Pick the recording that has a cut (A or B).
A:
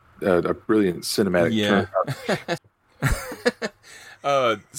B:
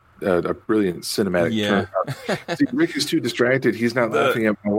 A